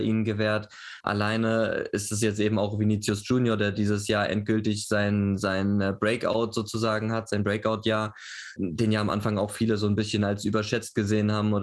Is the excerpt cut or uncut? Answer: cut